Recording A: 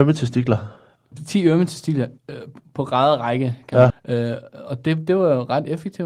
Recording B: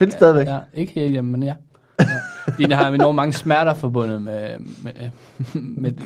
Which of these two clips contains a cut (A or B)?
A